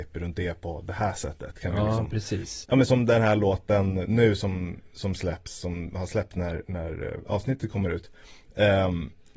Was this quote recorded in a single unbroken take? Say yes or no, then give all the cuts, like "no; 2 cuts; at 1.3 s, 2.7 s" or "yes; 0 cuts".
yes; 0 cuts